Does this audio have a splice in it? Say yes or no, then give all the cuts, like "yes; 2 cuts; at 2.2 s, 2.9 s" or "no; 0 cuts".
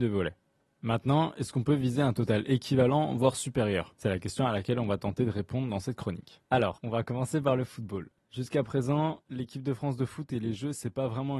no; 0 cuts